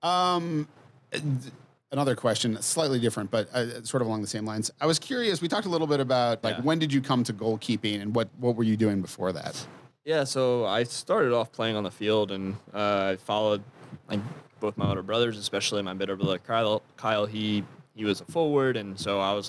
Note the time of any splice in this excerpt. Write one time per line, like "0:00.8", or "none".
0:06.4